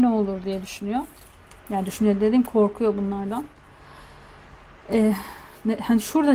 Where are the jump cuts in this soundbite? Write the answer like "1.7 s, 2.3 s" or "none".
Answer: none